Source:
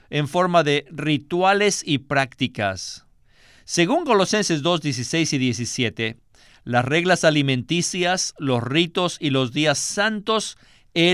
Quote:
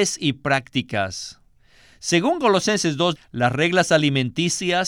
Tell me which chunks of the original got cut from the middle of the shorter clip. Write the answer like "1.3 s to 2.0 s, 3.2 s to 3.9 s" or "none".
4.8 s to 6.5 s